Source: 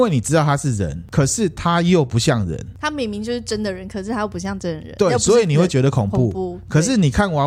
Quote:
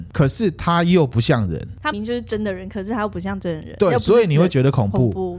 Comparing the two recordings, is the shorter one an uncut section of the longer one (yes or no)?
no